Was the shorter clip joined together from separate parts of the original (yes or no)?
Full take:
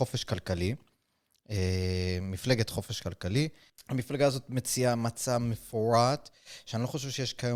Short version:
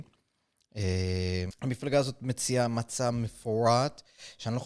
yes